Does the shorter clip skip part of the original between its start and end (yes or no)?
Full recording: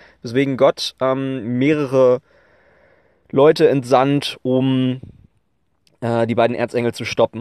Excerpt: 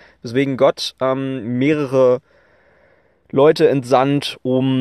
no